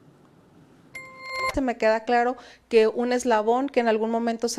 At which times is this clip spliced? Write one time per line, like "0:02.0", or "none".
0:01.5